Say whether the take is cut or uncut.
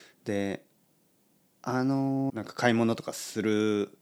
cut